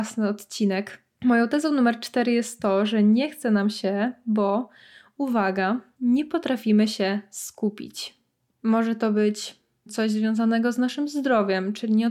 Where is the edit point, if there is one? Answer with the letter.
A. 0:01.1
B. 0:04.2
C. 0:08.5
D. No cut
C